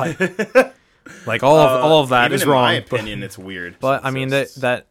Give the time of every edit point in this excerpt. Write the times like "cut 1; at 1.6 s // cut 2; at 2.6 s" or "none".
cut 1; at 3.8 s